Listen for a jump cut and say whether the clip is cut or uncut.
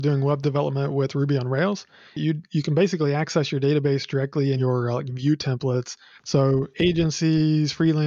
cut